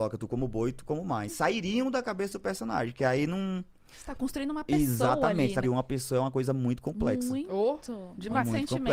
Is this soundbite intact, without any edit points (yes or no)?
no